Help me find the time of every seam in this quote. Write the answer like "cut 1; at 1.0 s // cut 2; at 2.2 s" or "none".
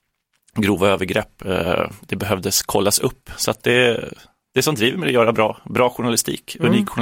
none